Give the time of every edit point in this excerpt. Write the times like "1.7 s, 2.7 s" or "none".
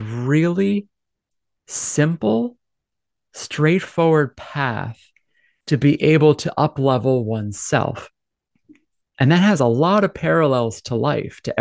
none